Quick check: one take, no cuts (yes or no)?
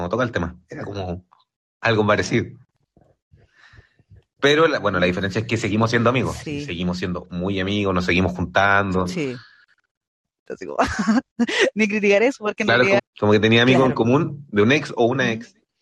no